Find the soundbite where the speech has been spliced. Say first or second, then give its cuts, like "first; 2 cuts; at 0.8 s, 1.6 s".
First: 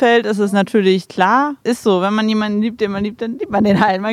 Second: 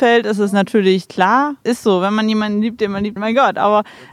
second; 1 cut; at 3.2 s